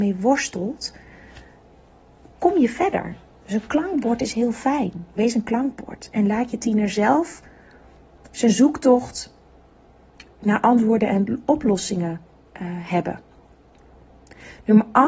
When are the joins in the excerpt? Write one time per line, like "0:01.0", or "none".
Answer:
0:05.2